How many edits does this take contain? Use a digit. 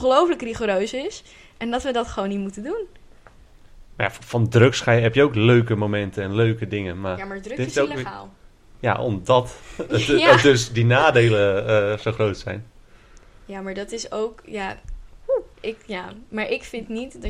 1